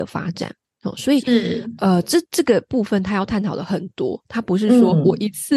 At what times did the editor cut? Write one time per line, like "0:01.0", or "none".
none